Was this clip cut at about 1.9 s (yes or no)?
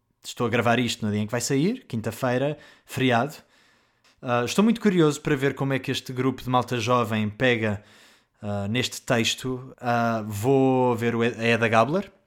no